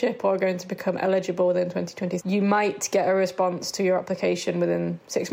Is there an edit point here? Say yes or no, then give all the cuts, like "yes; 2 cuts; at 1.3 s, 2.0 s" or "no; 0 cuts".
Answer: yes; 1 cut; at 2.2 s